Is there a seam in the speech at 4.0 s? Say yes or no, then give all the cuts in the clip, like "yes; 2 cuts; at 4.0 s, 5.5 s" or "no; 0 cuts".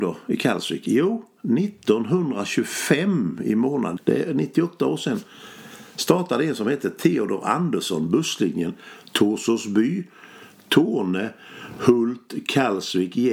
yes; 1 cut; at 4.0 s